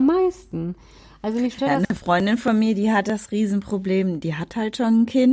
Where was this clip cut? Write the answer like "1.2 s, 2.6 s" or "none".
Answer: none